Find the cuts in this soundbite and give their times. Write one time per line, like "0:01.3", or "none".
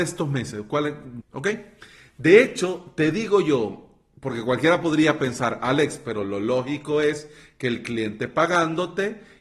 0:01.2